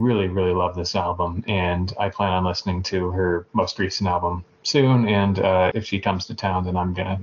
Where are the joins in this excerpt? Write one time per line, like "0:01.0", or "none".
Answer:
0:05.7

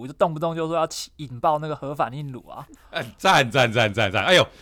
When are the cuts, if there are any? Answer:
none

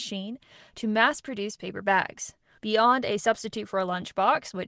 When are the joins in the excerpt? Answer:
0:02.6

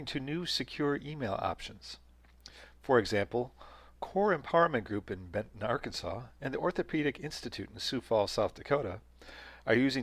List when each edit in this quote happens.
none

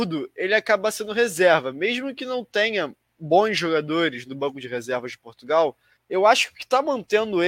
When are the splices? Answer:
0:06.0

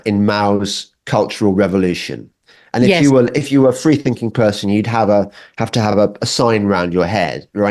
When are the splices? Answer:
none

